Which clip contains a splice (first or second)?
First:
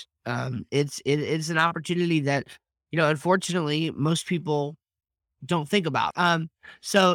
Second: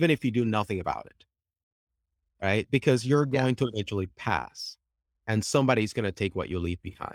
first